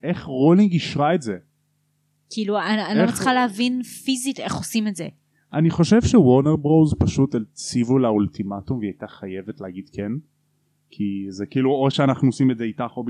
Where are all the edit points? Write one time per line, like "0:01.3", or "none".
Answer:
none